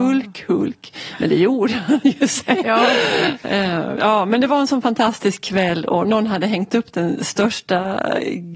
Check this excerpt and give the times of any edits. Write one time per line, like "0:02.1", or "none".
0:02.6
0:04.0